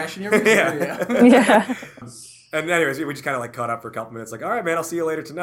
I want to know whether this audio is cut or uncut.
cut